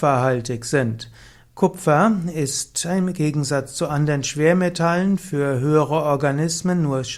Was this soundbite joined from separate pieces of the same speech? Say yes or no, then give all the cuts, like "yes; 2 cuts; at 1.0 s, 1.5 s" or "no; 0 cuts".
yes; 1 cut; at 1.5 s